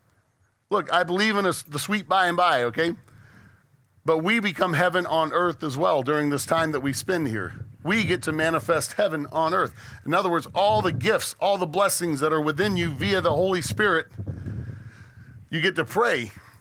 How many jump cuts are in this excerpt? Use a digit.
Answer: 0